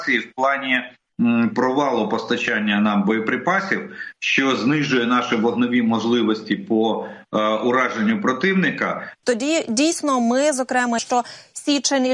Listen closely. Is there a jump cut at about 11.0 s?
yes; 2 cuts; at 9.2 s, 11.0 s

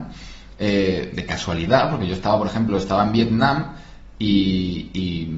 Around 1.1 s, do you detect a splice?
yes; 1 cut; at 1.1 s

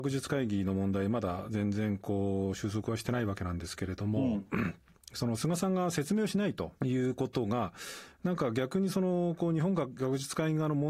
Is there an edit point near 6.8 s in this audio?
yes; 1 cut; at 6.8 s

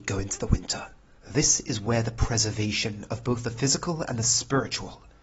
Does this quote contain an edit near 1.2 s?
yes; 1 cut; at 1.2 s

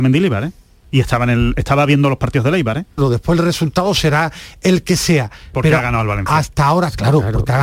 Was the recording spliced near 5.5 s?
no; 1 cut; at 3.0 s

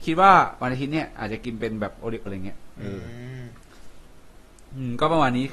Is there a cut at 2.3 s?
yes; 1 cut; at 2.3 s

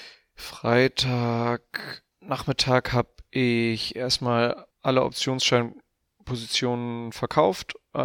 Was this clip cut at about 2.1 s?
yes; 2 cuts; at 2.1 s, 4.7 s

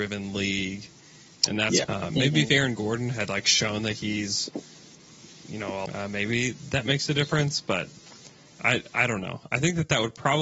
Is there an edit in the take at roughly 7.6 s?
no; 2 cuts; at 1.8 s, 5.9 s

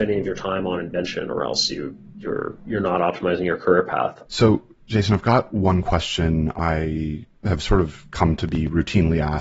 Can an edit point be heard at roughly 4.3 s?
yes; 2 cuts; at 4.3 s, 7.3 s

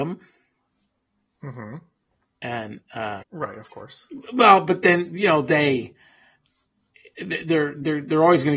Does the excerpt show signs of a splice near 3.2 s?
yes; 1 cut; at 3.2 s

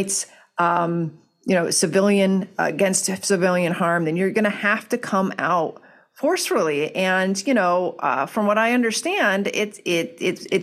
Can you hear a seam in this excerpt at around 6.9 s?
no; 0 cuts

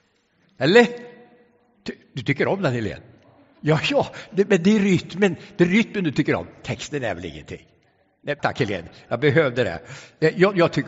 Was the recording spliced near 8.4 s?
yes; 1 cut; at 8.4 s

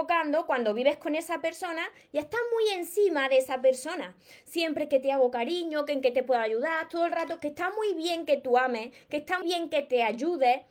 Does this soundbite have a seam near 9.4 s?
yes; 1 cut; at 9.4 s

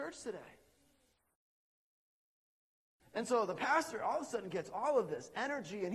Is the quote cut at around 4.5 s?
no; 1 cut; at 3.0 s

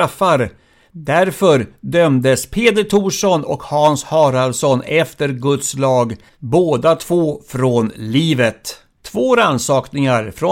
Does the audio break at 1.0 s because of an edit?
no; 2 cuts; at 6.3 s, 9.0 s

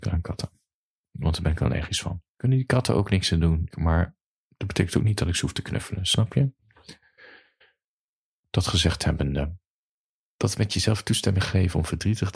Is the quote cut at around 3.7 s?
yes; 1 cut; at 3.7 s

